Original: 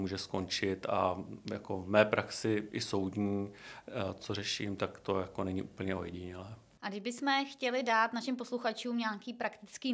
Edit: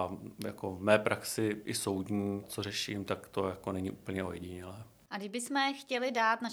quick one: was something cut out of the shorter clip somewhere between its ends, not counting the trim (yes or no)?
yes